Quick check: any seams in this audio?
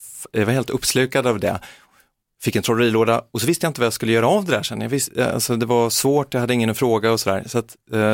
no; 0 cuts

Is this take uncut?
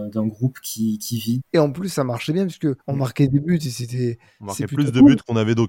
no; 2 cuts; at 1.4 s, 2.8 s

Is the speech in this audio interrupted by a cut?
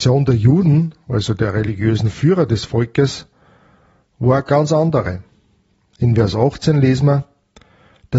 no; 0 cuts

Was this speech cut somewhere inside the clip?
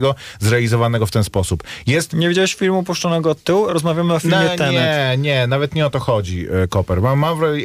no; 0 cuts

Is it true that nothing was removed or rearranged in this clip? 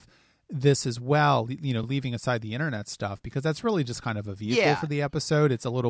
yes; 0 cuts

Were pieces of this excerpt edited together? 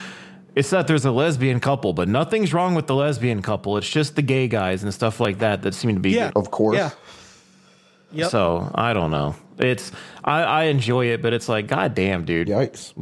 yes; 1 cut; at 6.3 s

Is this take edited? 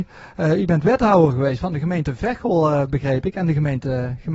no; 0 cuts

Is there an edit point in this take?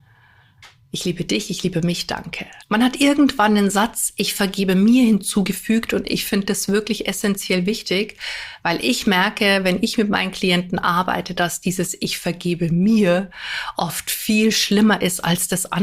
yes; 1 cut; at 2.6 s

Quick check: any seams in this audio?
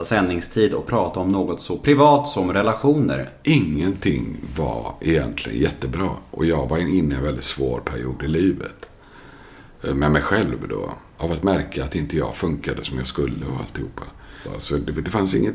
yes; 3 cuts; at 3.4 s, 11.2 s, 14.4 s

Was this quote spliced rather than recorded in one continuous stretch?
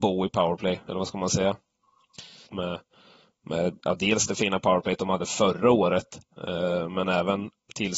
yes; 1 cut; at 2.5 s

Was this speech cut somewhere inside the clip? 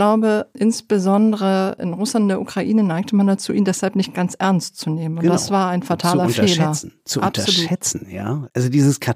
no; 0 cuts

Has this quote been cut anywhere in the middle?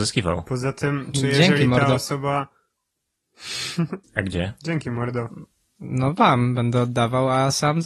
yes; 1 cut; at 4.0 s

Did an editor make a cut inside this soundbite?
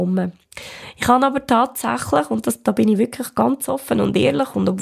no; 0 cuts

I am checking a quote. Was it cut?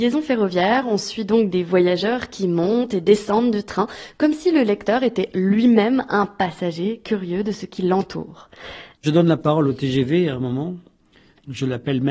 yes; 1 cut; at 8.9 s

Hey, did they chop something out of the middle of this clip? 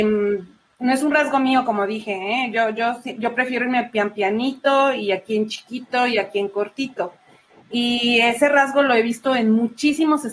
no; 0 cuts

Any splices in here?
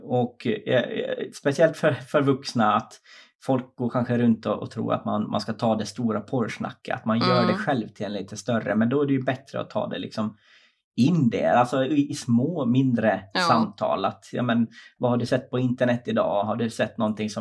no; 0 cuts

